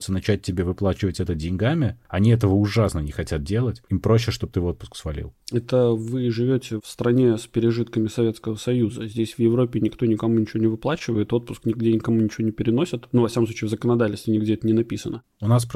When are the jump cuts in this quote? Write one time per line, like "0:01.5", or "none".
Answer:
none